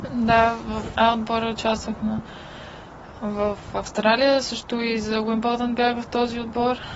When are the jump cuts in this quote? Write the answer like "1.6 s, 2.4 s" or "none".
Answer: 0.9 s